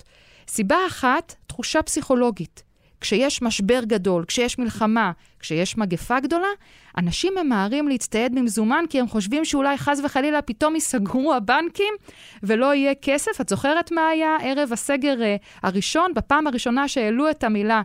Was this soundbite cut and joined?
no; 0 cuts

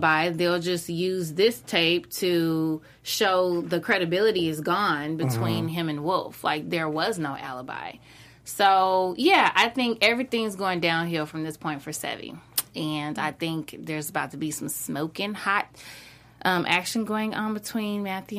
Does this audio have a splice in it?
no; 0 cuts

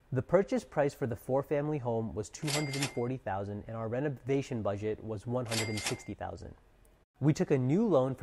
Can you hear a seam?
yes; 1 cut; at 7.0 s

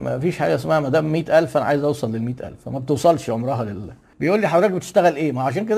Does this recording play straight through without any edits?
no; 1 cut; at 4.1 s

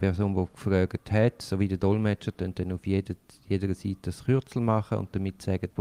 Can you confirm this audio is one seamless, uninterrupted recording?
yes; 0 cuts

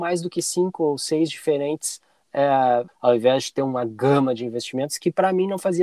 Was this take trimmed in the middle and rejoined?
yes; 1 cut; at 2.9 s

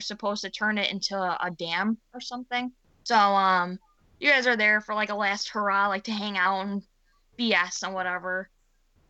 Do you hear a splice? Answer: no; 0 cuts

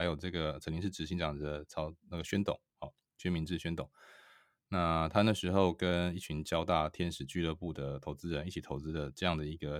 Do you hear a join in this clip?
no; 0 cuts

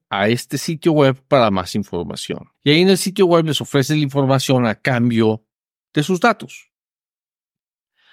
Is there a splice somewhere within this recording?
yes; 1 cut; at 2.5 s

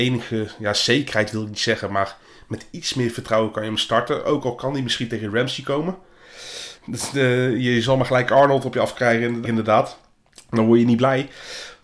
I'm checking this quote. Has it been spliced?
yes; 2 cuts; at 6.8 s, 9.5 s

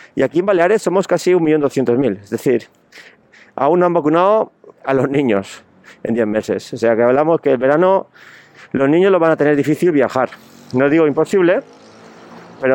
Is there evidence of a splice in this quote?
no; 0 cuts

